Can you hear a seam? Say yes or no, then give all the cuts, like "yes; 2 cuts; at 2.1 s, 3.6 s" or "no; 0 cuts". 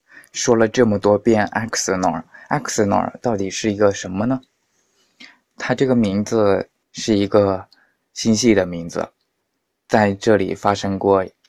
yes; 1 cut; at 6.8 s